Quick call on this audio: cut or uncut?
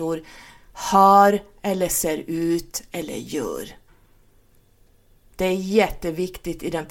uncut